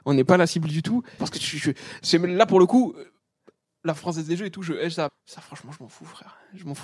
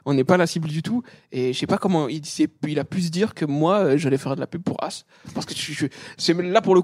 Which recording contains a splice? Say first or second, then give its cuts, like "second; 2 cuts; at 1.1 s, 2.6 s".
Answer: first; 2 cuts; at 1.2 s, 5.1 s